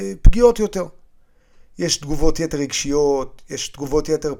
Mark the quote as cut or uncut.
uncut